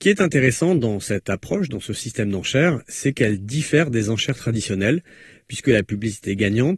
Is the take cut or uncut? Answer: uncut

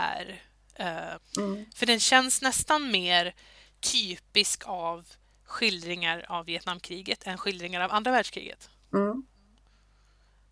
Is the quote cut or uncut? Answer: cut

